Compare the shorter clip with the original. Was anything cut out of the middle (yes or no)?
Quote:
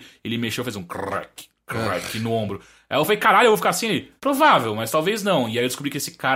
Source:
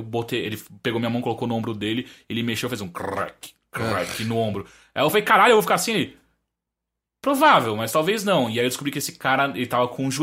yes